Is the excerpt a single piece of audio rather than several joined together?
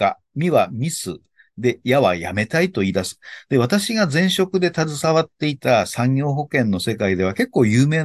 yes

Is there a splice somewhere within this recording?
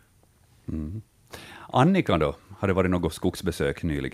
no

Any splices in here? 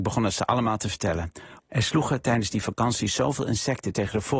yes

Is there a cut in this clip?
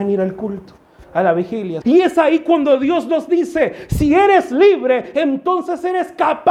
yes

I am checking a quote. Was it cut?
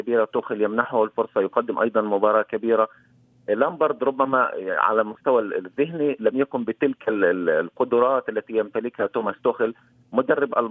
no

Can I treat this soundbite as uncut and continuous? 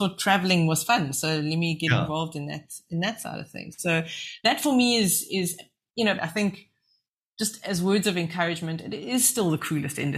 no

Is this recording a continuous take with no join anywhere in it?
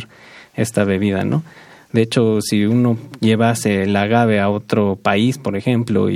yes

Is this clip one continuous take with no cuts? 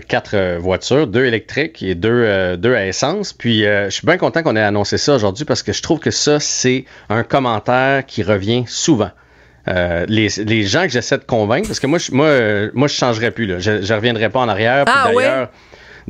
yes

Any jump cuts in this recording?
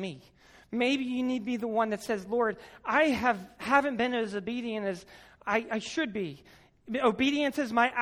no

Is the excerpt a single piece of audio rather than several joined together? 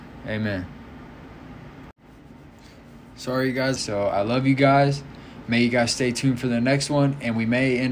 no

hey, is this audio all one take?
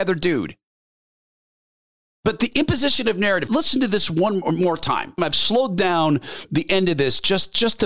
no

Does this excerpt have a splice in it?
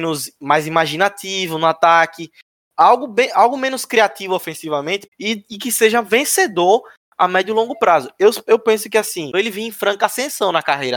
yes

